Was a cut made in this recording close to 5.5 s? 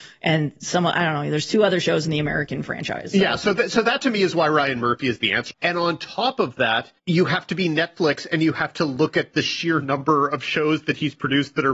yes; 2 cuts; at 5.5 s, 7.0 s

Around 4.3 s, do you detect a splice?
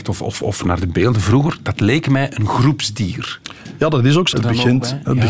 yes; 1 cut; at 4.3 s

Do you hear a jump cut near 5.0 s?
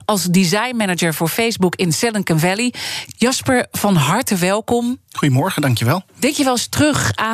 no; 1 cut; at 3.1 s

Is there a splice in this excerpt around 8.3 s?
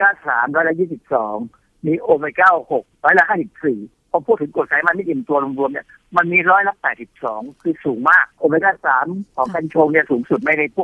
yes; 1 cut; at 8.3 s

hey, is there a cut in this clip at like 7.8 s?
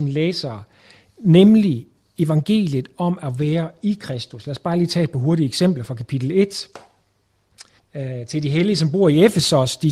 yes; 1 cut; at 7.8 s

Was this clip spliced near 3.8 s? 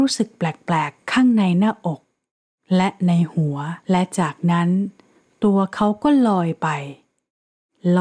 yes; 1 cut; at 3.8 s

